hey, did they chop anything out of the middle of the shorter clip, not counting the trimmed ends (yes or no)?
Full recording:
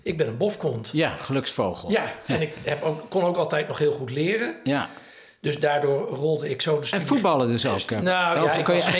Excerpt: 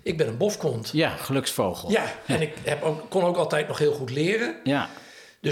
no